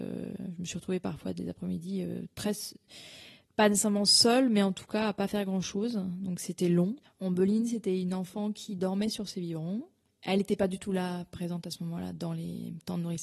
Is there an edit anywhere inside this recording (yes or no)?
yes